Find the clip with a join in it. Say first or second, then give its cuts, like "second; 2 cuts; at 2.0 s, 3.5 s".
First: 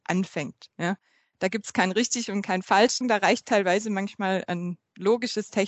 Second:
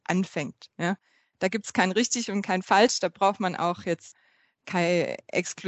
first; 1 cut; at 3.0 s